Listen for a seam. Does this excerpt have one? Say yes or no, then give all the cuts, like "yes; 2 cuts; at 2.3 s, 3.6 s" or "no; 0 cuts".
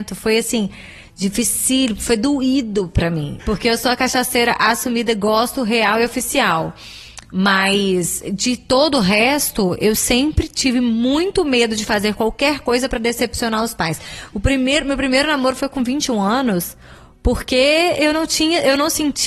yes; 1 cut; at 3.4 s